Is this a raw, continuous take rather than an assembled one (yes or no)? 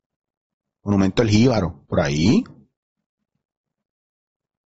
no